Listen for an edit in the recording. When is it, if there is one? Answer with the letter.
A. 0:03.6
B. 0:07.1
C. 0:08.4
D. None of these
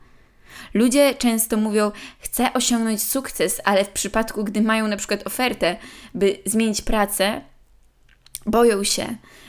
D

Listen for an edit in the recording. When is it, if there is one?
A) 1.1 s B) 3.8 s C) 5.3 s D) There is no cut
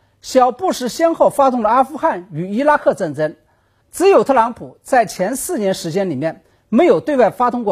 B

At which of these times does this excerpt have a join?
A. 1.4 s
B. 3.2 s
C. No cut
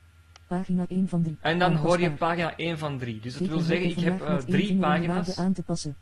C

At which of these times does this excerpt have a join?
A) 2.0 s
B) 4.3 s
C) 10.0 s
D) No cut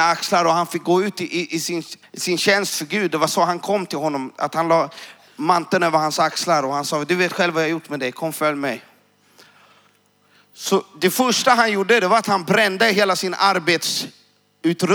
A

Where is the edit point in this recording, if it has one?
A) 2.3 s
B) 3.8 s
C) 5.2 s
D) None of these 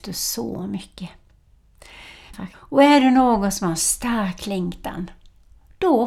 A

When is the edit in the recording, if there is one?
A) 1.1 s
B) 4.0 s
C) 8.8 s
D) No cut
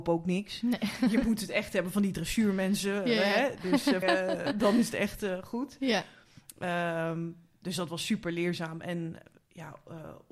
B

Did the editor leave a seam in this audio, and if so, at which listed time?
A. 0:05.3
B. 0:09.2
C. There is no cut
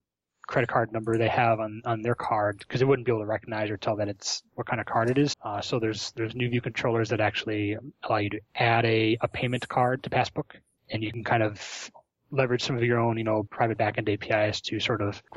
A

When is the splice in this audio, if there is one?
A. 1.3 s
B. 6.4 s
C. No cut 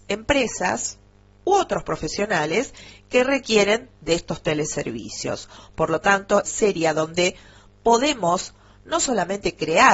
B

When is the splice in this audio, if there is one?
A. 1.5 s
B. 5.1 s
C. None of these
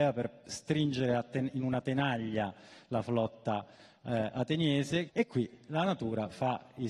B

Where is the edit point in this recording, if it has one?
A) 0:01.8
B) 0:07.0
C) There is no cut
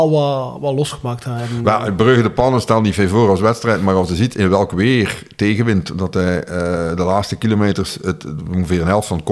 C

